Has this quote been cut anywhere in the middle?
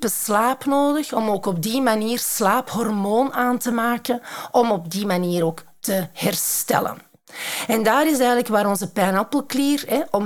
no; 0 cuts

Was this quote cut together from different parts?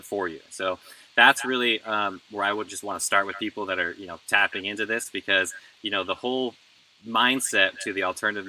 no; 0 cuts

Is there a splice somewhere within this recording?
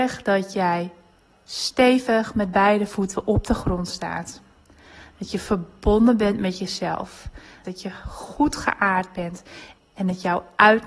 yes; 2 cuts; at 7.6 s, 9.8 s

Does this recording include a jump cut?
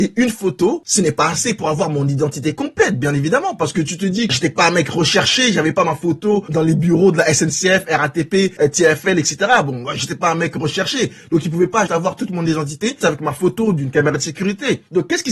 yes; 2 cuts; at 11.9 s, 13.0 s

